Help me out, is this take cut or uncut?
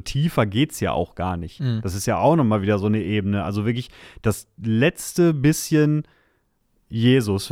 uncut